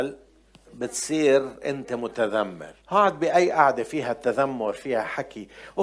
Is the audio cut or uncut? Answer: cut